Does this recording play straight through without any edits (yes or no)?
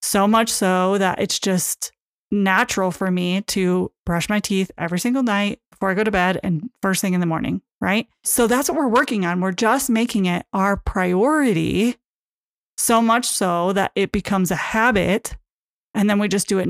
no